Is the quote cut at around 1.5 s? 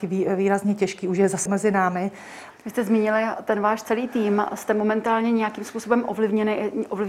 yes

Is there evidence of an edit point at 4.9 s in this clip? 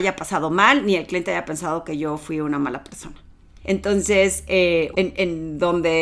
yes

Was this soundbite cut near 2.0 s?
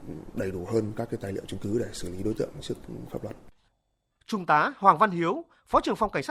no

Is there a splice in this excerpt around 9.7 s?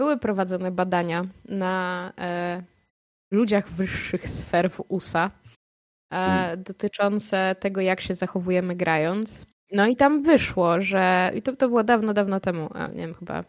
yes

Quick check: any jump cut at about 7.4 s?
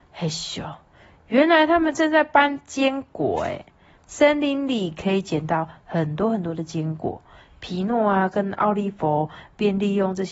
no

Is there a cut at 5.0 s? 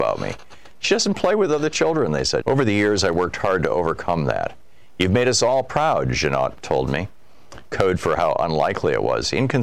no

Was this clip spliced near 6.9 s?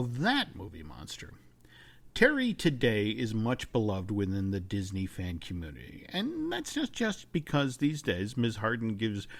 no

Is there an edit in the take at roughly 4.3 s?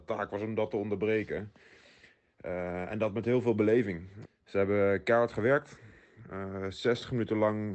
yes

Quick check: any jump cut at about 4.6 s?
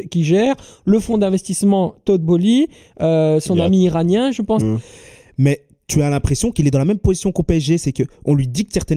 yes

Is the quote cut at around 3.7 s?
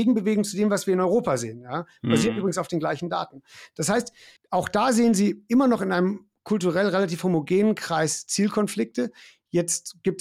no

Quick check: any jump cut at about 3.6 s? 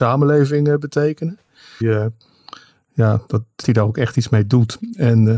yes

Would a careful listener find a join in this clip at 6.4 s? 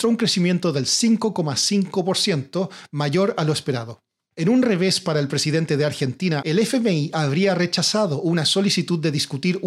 yes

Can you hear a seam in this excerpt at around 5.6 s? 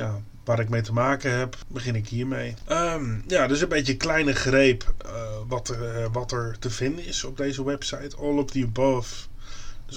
no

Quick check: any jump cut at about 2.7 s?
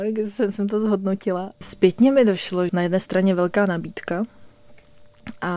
yes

